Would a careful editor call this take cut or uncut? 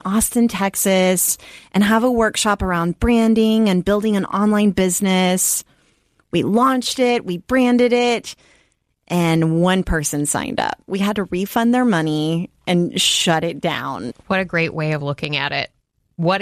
cut